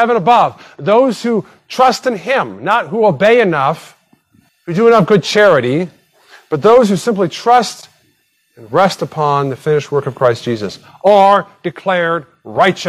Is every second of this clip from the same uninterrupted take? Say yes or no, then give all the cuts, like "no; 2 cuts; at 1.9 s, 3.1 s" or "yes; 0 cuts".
no; 1 cut; at 4.5 s